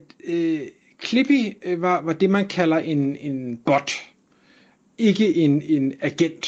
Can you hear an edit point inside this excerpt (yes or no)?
no